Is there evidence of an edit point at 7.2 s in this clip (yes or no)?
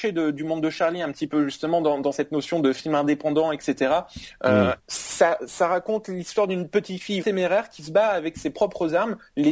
yes